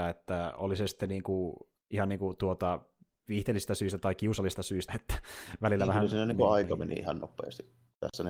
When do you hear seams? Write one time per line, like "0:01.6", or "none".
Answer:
0:01.8
0:04.9